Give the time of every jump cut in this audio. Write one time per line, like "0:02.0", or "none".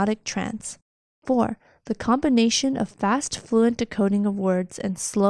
0:01.1